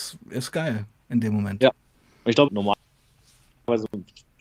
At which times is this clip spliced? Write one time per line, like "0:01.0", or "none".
0:02.5